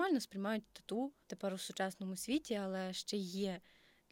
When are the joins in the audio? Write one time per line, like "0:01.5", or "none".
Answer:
0:01.2